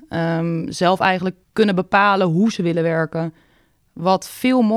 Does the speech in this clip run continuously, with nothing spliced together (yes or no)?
no